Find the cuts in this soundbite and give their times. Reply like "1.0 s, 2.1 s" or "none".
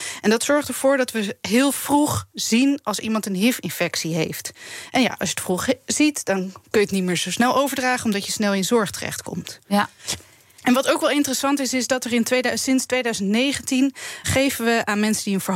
14.2 s